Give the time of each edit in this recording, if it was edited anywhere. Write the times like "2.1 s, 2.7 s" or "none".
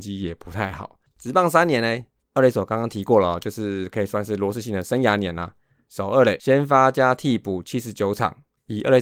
1.1 s